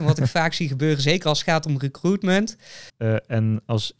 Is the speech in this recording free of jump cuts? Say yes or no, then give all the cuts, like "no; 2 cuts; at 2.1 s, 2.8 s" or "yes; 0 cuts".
no; 1 cut; at 2.9 s